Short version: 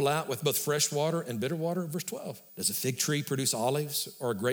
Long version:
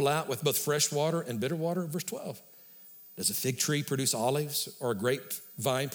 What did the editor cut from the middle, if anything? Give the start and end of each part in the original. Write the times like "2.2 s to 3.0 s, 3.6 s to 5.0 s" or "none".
2.5 s to 3.1 s